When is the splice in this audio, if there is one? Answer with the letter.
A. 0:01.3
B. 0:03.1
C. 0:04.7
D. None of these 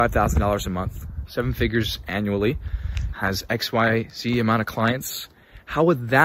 B